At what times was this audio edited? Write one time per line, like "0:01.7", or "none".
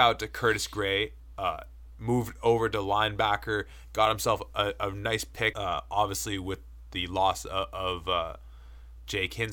0:05.5